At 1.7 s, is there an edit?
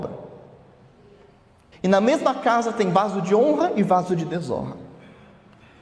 yes; 1 cut; at 1.7 s

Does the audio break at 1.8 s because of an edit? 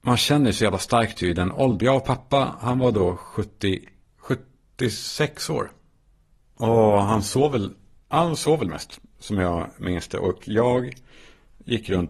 yes; 1 cut; at 1.8 s

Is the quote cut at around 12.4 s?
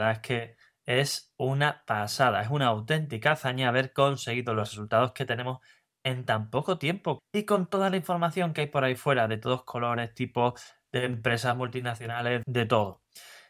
yes; 2 cuts; at 7.2 s, 12.4 s

